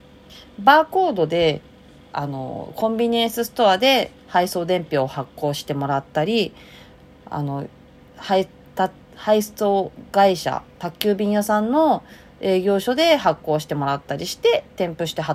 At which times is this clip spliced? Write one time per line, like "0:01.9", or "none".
none